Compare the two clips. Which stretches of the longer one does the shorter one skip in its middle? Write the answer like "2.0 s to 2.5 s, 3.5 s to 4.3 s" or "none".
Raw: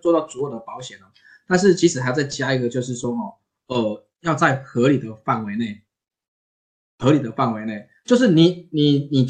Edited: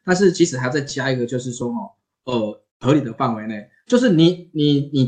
4.1 s to 6.9 s